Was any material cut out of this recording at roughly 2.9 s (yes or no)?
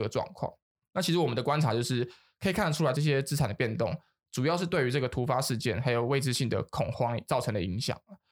yes